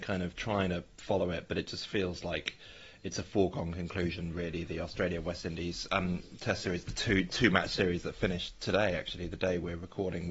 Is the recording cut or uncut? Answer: uncut